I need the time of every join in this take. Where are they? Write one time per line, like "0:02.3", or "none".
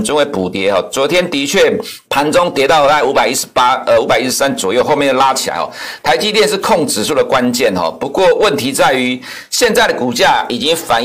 0:02.0